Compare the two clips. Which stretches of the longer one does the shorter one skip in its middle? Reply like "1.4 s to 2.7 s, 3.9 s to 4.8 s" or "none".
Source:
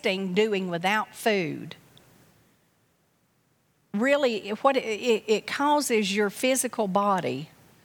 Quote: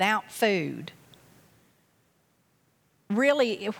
none